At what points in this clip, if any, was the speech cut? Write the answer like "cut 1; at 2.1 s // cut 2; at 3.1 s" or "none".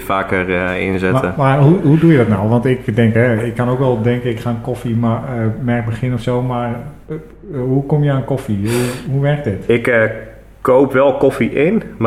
none